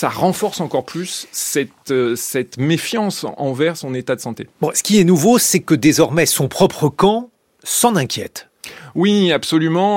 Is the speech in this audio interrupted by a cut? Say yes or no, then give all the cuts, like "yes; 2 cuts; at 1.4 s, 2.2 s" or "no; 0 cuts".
no; 0 cuts